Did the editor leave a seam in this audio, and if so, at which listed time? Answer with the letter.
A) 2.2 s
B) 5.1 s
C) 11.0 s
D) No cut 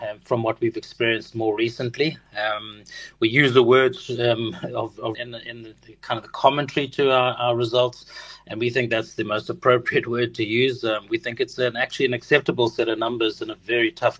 B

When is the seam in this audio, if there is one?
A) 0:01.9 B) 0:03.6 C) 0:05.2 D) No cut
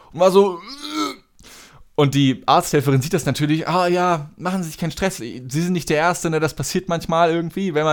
C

